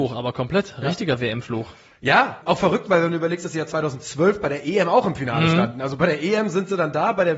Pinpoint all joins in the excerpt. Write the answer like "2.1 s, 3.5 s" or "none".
2.4 s